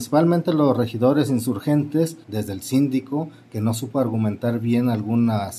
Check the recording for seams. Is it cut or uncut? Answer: cut